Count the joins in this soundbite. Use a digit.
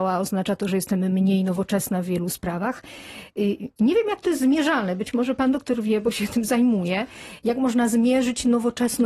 0